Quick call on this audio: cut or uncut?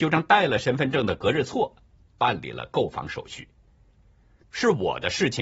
cut